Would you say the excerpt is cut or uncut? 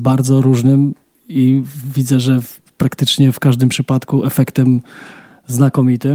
uncut